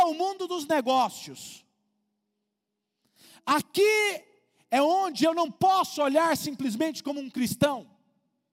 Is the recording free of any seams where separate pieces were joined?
yes; 0 cuts

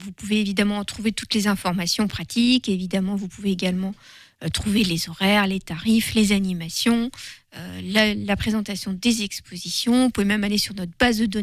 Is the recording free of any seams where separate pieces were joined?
yes; 0 cuts

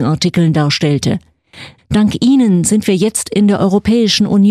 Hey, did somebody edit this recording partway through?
yes; 1 cut; at 1.8 s

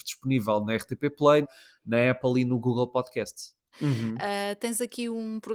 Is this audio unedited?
no; 2 cuts; at 1.4 s, 3.7 s

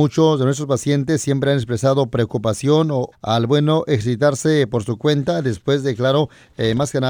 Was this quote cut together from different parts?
yes; 1 cut; at 3.1 s

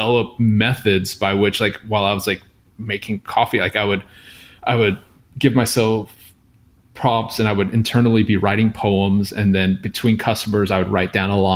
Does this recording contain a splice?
no; 0 cuts

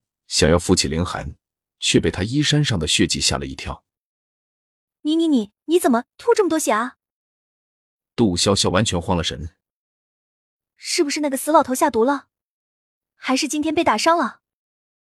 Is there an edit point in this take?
no; 0 cuts

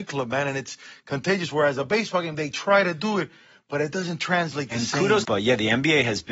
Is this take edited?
yes; 1 cut; at 5.2 s

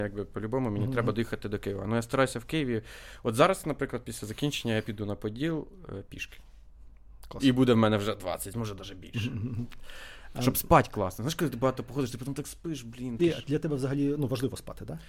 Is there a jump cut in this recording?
yes; 1 cut; at 13.2 s

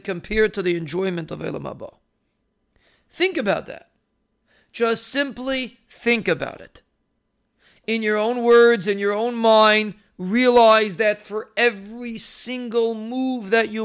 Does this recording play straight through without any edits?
yes; 0 cuts

